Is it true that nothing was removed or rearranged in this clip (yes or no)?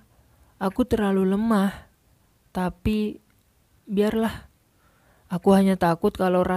yes